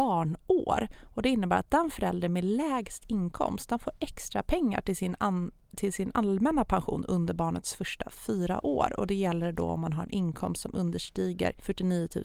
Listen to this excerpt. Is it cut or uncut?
uncut